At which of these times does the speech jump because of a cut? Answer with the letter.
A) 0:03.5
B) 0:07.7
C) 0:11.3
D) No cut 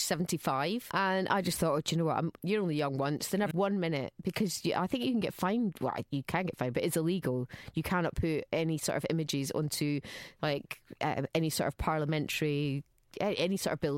A